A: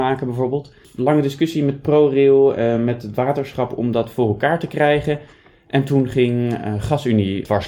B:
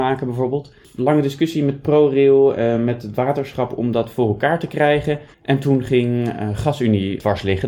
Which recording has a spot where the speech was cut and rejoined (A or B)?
B